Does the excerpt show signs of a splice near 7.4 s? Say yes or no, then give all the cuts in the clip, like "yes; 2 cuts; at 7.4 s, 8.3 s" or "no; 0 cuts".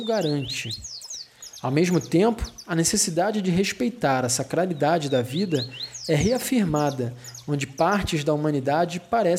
no; 0 cuts